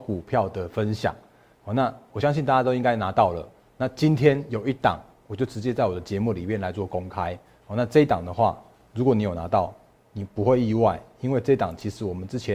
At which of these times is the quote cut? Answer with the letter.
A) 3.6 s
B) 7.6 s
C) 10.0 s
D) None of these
D